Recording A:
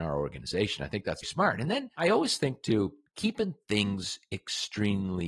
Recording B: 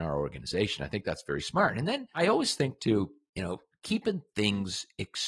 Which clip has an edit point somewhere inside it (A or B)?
A